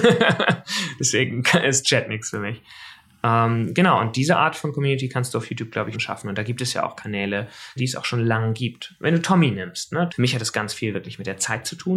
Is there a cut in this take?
yes; 3 cuts; at 5.9 s, 7.8 s, 10.1 s

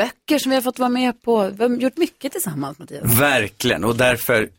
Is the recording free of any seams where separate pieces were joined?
yes; 0 cuts

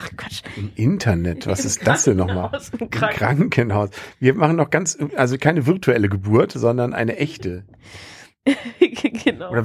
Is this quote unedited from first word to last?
yes; 0 cuts

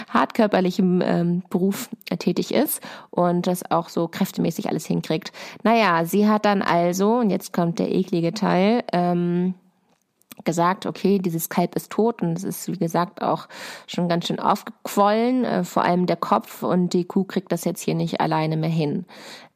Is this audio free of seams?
yes; 0 cuts

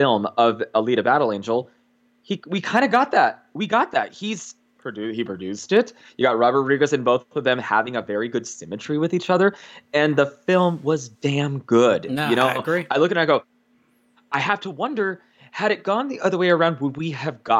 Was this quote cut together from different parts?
no; 0 cuts

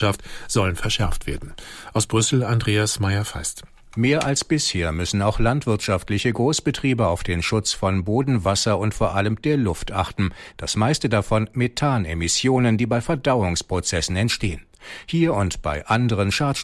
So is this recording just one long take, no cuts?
no; 1 cut; at 10.5 s

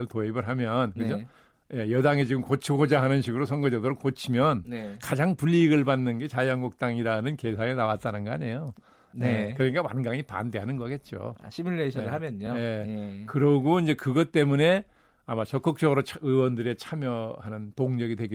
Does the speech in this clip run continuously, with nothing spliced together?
yes; 0 cuts

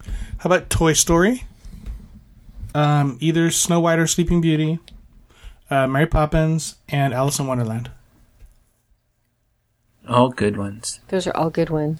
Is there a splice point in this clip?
yes; 1 cut; at 2.7 s

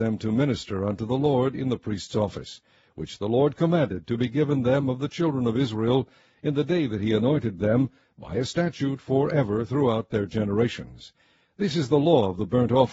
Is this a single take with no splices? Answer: yes; 0 cuts

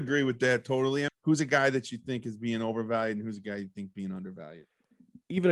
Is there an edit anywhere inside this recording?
yes; 1 cut; at 1.1 s

